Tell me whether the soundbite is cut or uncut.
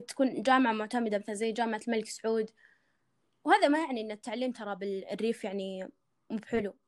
uncut